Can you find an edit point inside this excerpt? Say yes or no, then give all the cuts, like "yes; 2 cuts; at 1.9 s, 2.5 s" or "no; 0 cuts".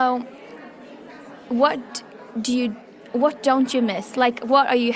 no; 0 cuts